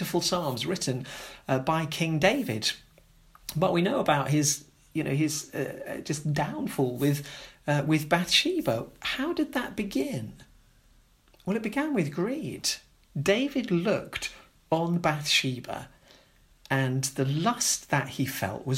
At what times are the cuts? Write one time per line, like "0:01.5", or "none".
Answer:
none